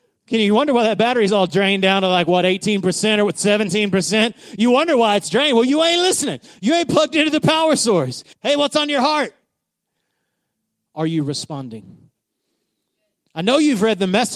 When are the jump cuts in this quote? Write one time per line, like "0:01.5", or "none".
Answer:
0:08.3
0:10.8